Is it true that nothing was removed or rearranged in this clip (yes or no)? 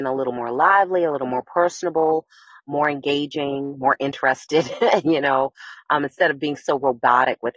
yes